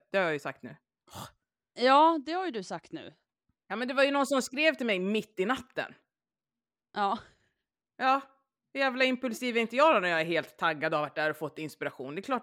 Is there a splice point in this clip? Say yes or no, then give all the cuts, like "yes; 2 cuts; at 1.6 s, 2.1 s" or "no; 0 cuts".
no; 0 cuts